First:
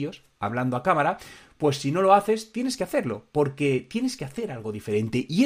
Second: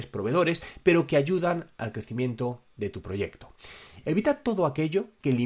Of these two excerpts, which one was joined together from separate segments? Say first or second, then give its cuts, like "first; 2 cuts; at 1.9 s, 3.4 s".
second; 1 cut; at 4.0 s